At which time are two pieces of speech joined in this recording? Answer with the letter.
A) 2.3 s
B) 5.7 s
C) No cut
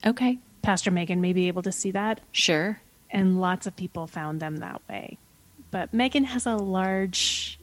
A